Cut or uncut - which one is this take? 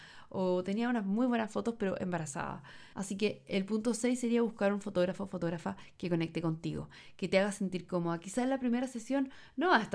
cut